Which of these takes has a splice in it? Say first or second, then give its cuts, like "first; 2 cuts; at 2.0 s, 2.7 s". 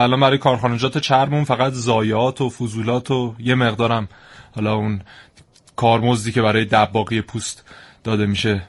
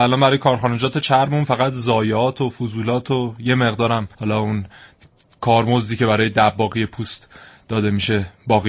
second; 1 cut; at 4.1 s